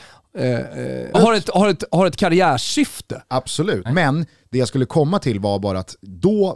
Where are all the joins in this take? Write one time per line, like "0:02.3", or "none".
0:01.1
0:03.9